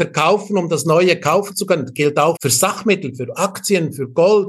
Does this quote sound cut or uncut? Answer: cut